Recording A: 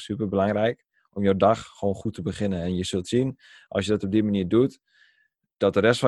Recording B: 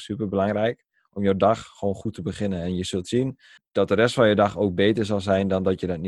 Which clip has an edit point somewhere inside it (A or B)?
B